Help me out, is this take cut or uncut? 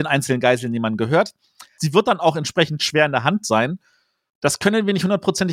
cut